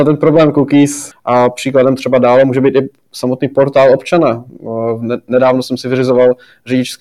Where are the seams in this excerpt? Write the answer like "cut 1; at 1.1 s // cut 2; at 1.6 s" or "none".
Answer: cut 1; at 1.1 s